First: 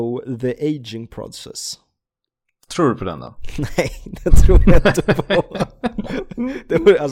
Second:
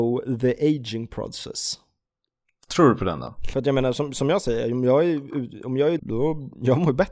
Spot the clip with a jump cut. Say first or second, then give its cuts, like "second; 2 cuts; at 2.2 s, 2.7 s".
second; 2 cuts; at 3.5 s, 6.0 s